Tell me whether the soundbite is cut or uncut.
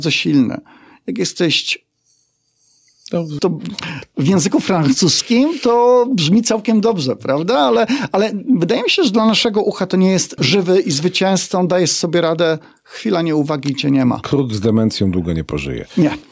cut